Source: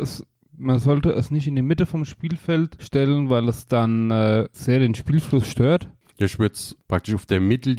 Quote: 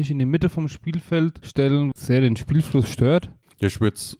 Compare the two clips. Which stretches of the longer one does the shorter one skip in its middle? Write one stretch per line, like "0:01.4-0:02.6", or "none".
0:03.3-0:04.5